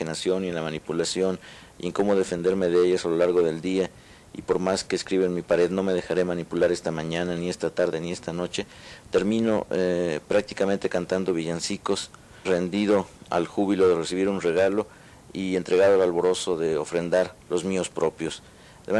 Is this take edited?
yes; 2 cuts; at 12.4 s, 17.4 s

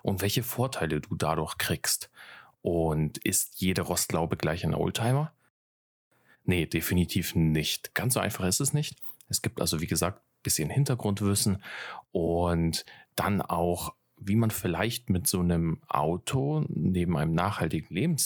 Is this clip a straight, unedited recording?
yes; 0 cuts

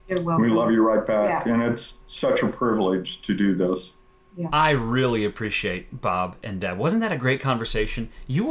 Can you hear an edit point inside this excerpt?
yes; 1 cut; at 4.5 s

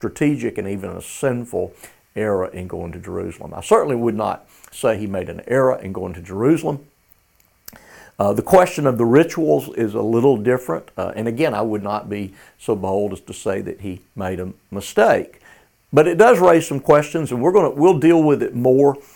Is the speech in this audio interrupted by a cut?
no; 0 cuts

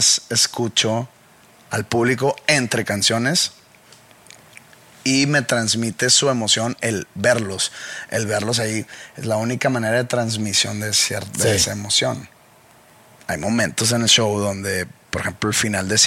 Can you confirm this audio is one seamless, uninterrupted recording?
yes; 0 cuts

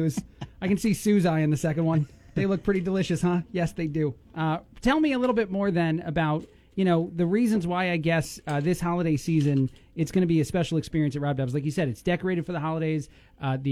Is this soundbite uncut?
yes; 0 cuts

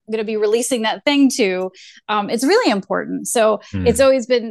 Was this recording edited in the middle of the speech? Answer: no; 0 cuts

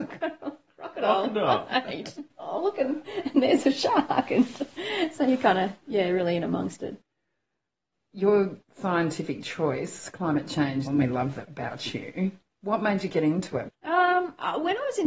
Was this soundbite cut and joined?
yes; 2 cuts; at 10.9 s, 13.7 s

